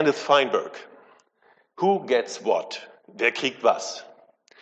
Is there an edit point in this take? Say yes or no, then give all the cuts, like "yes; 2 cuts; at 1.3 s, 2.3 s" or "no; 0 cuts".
no; 0 cuts